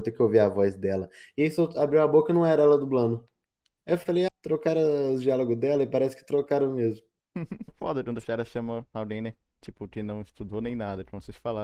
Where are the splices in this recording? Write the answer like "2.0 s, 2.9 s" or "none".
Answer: 4.3 s, 7.7 s